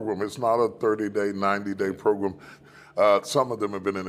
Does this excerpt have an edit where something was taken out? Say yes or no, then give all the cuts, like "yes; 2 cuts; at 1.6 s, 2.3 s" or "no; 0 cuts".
yes; 1 cut; at 2.6 s